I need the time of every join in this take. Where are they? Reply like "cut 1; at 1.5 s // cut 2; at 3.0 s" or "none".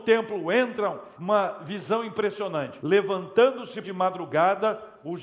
cut 1; at 1.1 s // cut 2; at 2.8 s // cut 3; at 3.8 s